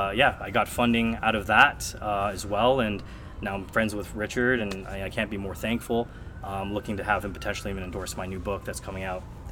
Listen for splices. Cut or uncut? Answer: uncut